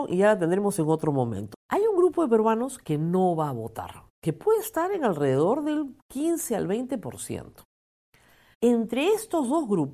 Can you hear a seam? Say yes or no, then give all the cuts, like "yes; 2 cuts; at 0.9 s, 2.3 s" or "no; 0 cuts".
yes; 3 cuts; at 1.5 s, 4.1 s, 8.5 s